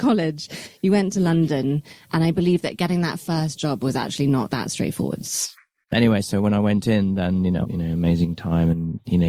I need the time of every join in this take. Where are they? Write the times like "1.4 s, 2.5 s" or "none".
5.6 s, 7.6 s